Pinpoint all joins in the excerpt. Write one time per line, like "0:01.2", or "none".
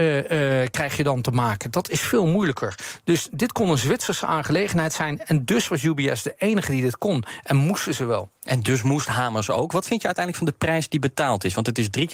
none